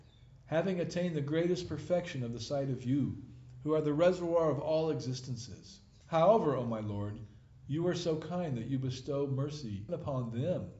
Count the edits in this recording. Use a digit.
2